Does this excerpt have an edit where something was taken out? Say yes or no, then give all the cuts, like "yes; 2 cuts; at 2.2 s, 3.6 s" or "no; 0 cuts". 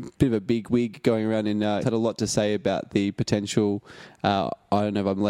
yes; 1 cut; at 1.8 s